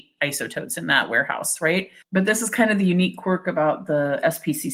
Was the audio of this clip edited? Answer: yes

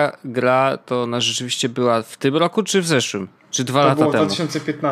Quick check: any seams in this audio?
no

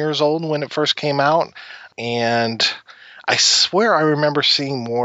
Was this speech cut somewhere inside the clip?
yes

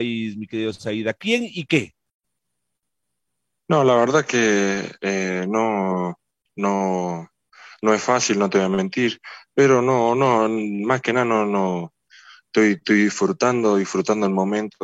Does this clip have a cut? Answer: no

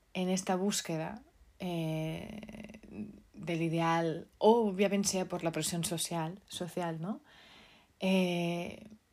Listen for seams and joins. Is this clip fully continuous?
yes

